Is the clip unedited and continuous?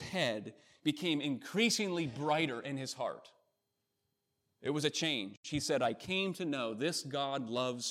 yes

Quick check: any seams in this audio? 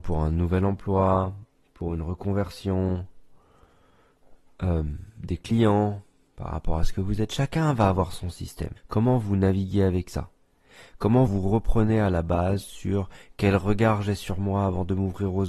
yes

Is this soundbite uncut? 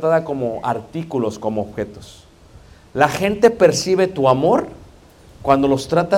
yes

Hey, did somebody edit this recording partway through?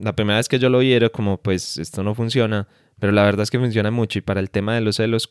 no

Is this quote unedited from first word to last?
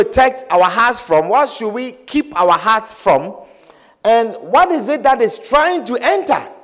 yes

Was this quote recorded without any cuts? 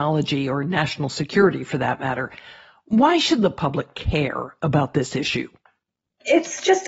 yes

